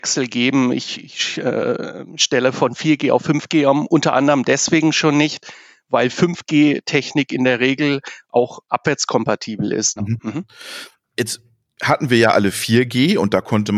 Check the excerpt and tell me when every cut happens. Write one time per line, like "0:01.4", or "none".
0:10.0